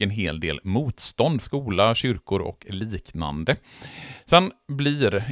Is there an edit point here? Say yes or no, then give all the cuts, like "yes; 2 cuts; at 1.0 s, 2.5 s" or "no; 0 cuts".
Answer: yes; 2 cuts; at 1.4 s, 4.2 s